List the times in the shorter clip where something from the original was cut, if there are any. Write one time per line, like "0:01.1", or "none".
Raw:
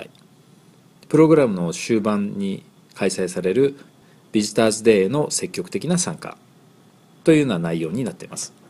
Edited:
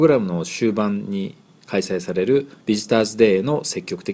0:02.6

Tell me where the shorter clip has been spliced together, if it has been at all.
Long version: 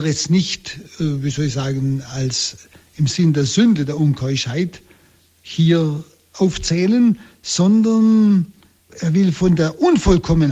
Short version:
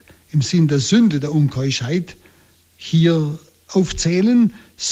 none

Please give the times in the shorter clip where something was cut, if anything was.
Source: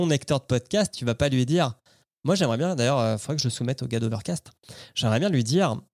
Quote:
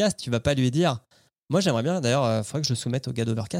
none

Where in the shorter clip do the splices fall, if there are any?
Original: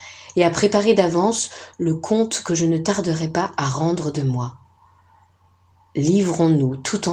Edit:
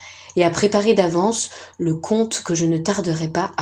none

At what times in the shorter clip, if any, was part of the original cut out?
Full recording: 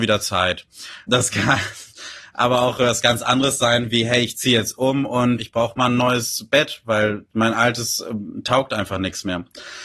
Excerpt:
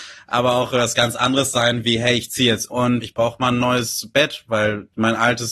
0:02.7

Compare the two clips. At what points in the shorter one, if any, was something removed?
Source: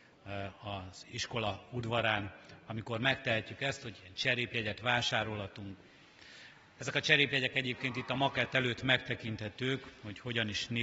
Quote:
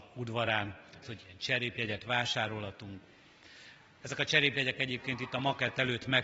0:01.0

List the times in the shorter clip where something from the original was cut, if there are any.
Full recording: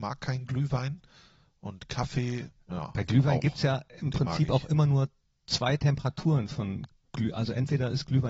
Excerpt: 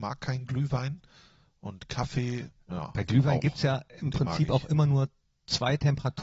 none

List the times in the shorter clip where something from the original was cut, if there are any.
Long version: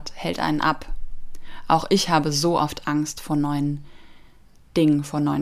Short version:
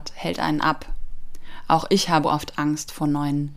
0:02.2

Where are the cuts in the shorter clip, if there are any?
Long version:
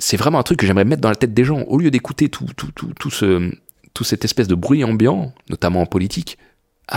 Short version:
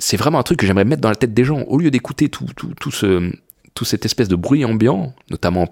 0:02.5

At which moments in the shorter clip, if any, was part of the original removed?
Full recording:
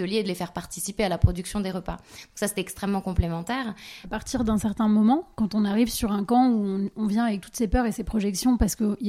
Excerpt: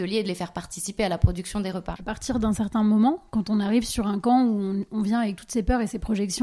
0:02.0

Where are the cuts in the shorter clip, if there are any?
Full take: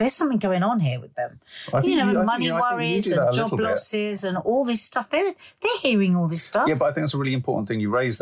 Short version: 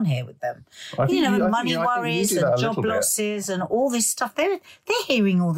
none

